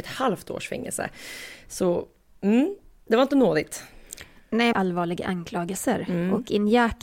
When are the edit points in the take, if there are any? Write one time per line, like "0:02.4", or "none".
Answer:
0:04.7